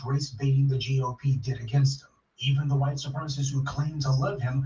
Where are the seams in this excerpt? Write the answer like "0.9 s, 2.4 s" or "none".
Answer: 2.2 s

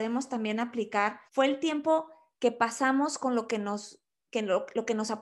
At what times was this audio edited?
1.3 s

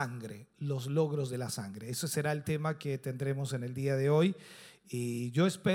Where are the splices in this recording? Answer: none

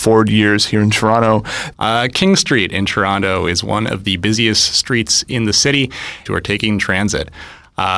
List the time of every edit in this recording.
1.7 s, 6.3 s

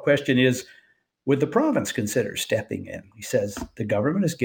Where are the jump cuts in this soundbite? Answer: 3.1 s

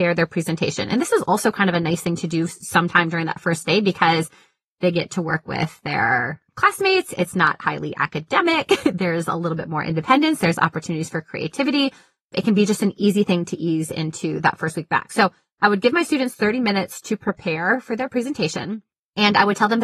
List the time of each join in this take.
none

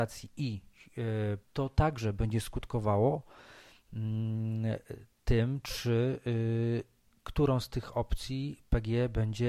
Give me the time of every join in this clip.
1.4 s

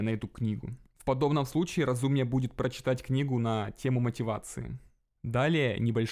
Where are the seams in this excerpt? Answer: 5.2 s

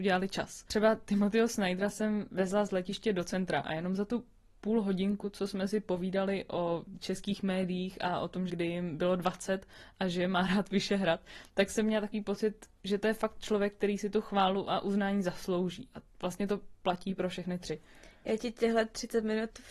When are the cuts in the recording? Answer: 8.5 s

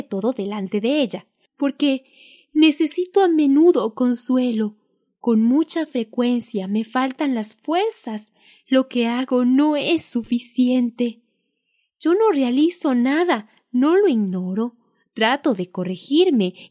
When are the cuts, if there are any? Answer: 1.5 s

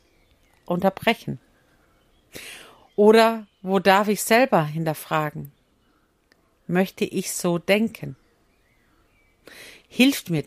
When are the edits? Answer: none

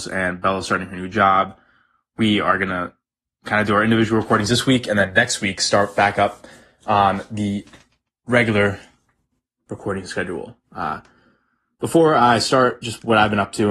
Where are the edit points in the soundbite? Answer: none

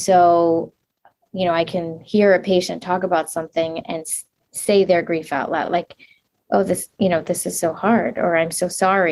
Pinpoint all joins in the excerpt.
none

